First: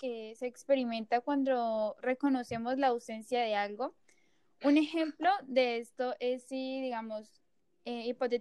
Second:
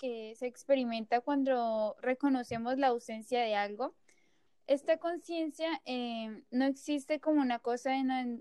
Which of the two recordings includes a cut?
second; 1 cut; at 4.5 s

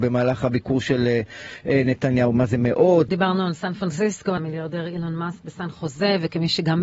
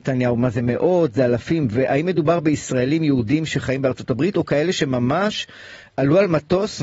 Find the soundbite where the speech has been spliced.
first; 2 cuts; at 3.1 s, 4.4 s

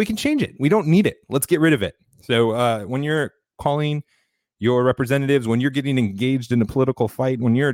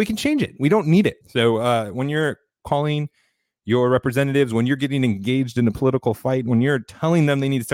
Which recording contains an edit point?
second; 1 cut; at 1.2 s

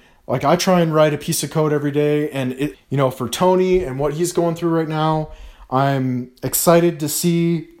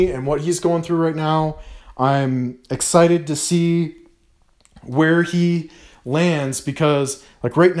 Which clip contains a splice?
first; 1 cut; at 2.7 s

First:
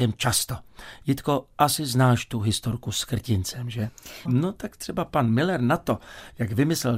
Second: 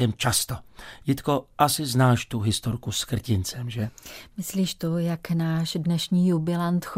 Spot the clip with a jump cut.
first; 1 cut; at 4.3 s

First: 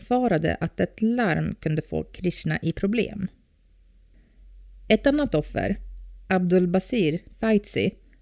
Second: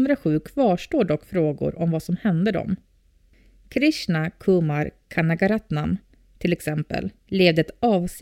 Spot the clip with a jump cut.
second; 1 cut; at 7.2 s

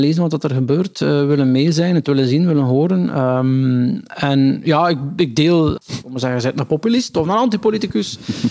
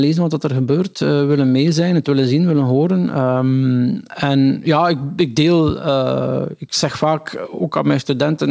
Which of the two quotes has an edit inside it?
first; 1 cut; at 5.8 s

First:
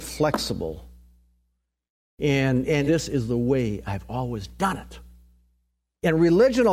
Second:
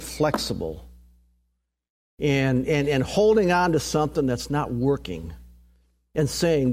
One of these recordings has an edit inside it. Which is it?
first; 1 cut; at 2.9 s

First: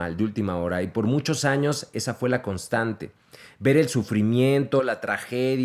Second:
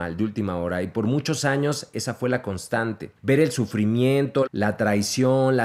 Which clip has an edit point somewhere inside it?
second; 2 cuts; at 3.2 s, 4.5 s

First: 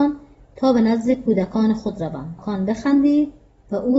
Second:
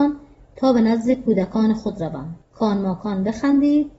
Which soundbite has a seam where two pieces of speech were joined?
first; 1 cut; at 2.4 s

